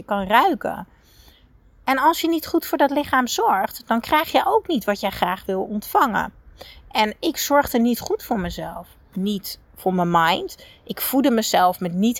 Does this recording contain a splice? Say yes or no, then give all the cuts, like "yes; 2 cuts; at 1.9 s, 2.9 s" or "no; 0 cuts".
no; 0 cuts